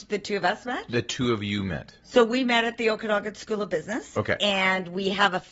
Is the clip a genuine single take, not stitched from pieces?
yes; 0 cuts

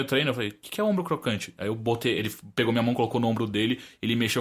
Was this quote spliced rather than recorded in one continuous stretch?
no; 0 cuts

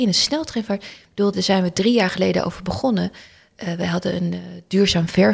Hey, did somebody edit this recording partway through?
yes; 1 cut; at 1.3 s

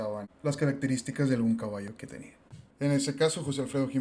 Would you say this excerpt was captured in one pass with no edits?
no; 1 cut; at 2.7 s

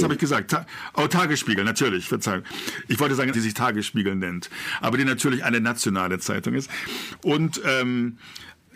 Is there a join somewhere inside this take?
yes; 1 cut; at 3.3 s

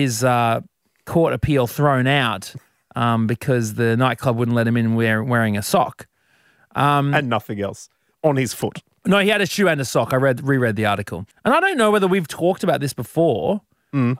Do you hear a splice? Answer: yes; 1 cut; at 11.3 s

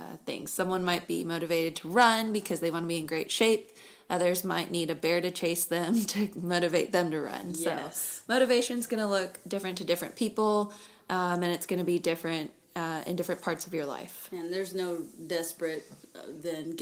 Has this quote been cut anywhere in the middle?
no; 0 cuts

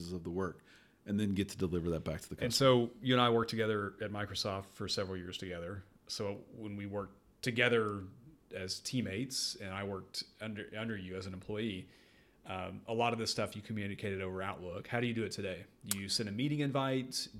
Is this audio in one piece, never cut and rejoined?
yes; 0 cuts

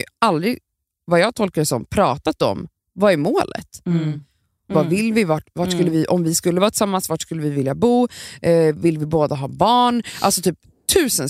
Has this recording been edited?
yes; 1 cut; at 4.7 s

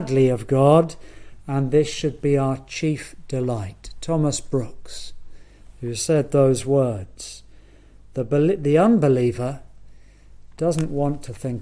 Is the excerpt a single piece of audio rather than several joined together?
yes; 0 cuts

